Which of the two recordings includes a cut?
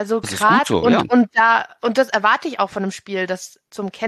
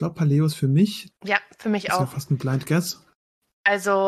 second; 1 cut; at 1.1 s

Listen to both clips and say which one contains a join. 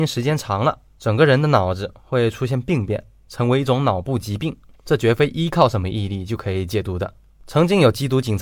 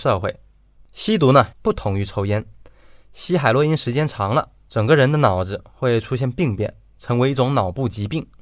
second; 1 cut; at 1.5 s

